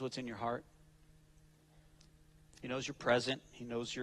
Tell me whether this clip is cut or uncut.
cut